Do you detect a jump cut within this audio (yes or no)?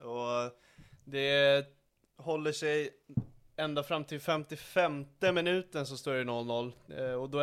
no